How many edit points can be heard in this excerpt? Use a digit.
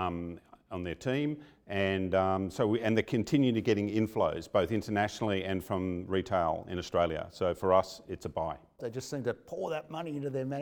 1